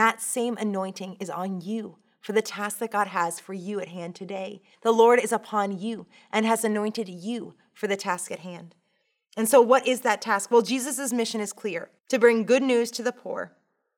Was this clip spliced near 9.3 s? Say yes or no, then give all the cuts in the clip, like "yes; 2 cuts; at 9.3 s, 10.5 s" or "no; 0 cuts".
no; 2 cuts; at 4.7 s, 12.0 s